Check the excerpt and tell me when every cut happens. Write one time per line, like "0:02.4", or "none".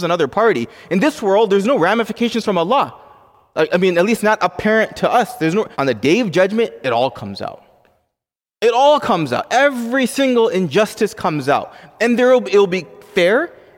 0:05.7

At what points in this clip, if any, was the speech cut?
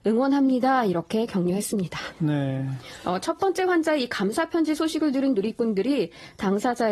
0:02.1

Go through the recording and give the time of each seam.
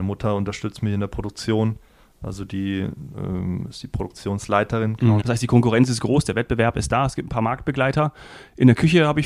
0:05.2

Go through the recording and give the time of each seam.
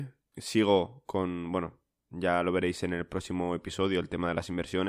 none

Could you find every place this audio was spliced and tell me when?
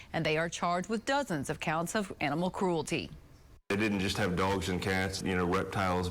0:03.6
0:05.2

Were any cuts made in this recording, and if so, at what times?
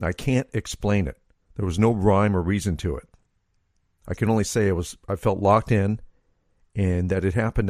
none

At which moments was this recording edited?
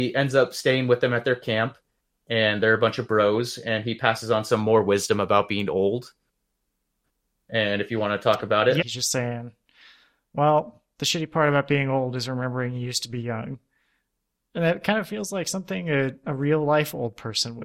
0:08.8

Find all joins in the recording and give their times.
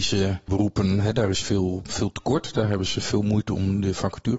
none

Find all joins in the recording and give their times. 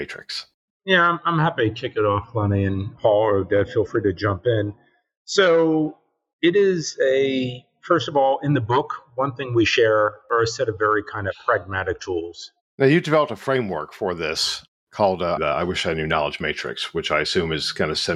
0:12.6
0:15.4

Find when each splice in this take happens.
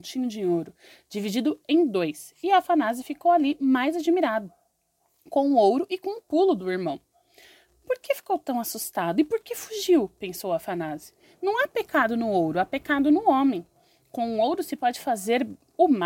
none

